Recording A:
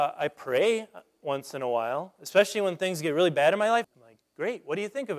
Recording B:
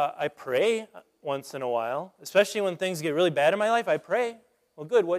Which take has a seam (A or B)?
A